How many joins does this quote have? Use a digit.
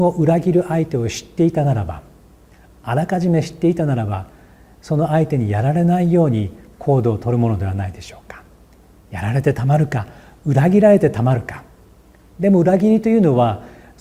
0